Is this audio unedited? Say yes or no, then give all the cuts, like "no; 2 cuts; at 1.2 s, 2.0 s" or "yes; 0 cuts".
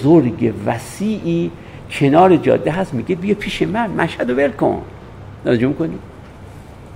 no; 1 cut; at 5.4 s